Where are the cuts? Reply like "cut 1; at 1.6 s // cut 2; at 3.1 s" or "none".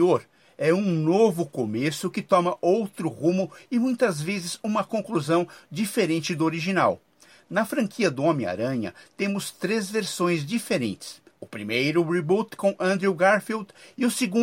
cut 1; at 11.3 s

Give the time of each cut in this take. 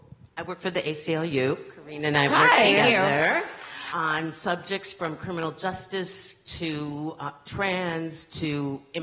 cut 1; at 3.9 s

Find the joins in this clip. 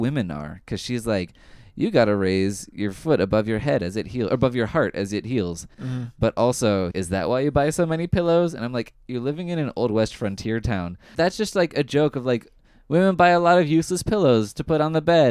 cut 1; at 5.7 s // cut 2; at 6.9 s // cut 3; at 11.2 s

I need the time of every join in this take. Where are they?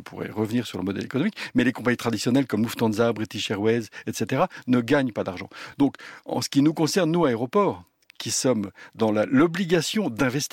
none

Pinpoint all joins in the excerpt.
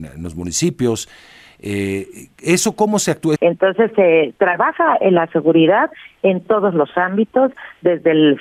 cut 1; at 3.4 s

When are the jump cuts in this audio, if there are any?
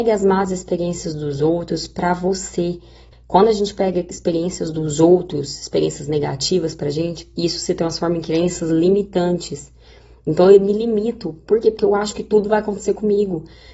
cut 1; at 3.1 s

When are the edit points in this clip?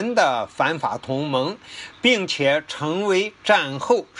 none

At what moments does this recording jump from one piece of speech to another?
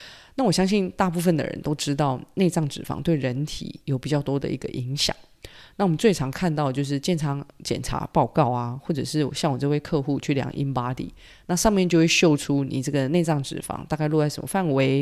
none

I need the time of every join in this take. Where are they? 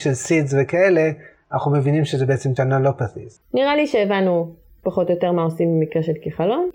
cut 1; at 3.4 s

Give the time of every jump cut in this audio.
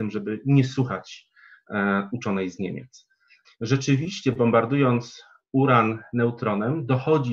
cut 1; at 3.4 s

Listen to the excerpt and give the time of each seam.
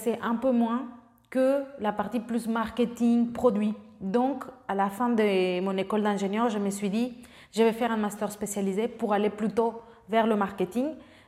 none

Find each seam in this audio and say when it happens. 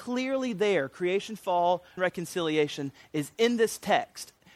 cut 1; at 2.0 s

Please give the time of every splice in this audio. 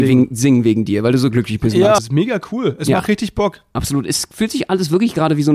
cut 1; at 2.0 s

